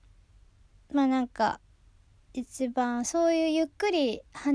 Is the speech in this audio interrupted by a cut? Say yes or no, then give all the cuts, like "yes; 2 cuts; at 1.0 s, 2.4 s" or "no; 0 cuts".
no; 0 cuts